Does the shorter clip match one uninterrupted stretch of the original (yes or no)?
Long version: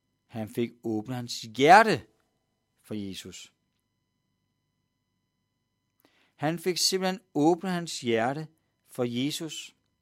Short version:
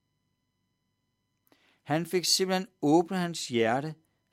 yes